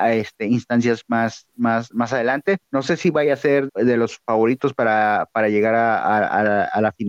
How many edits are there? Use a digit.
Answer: 2